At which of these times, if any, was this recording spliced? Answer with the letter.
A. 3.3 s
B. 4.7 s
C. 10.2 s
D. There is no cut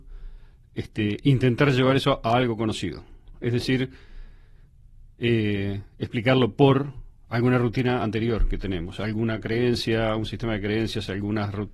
A